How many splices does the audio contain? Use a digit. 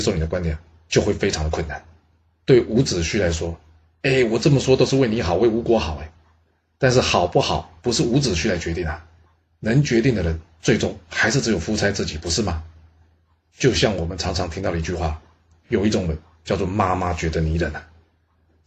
1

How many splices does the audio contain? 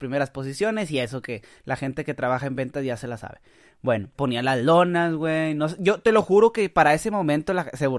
1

